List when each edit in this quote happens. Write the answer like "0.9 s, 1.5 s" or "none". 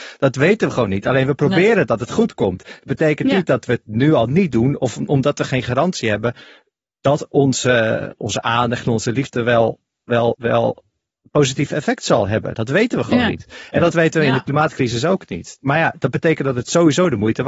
10.3 s

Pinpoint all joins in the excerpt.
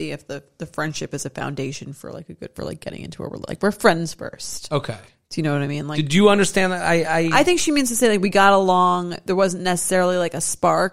none

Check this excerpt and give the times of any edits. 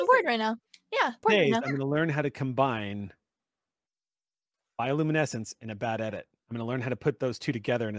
1.2 s

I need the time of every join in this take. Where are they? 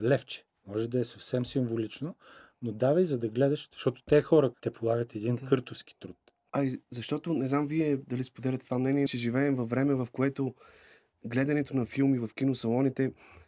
4.5 s, 9.1 s

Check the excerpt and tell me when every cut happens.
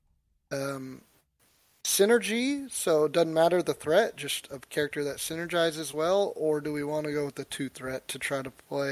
none

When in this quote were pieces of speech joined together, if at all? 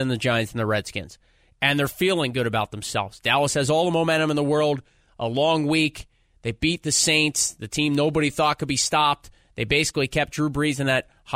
none

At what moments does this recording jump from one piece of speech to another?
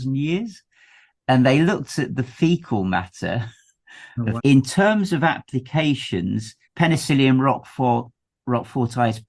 4.4 s, 6.6 s

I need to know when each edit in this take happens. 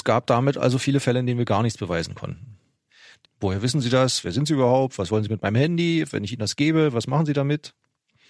3.2 s

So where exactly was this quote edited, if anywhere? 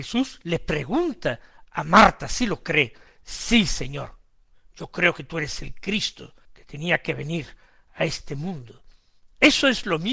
3.1 s, 6.5 s

